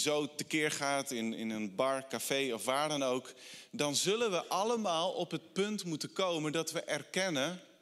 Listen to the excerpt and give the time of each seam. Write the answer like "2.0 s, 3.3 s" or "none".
none